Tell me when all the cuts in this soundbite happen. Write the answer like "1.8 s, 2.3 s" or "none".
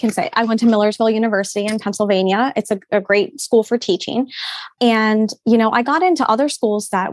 none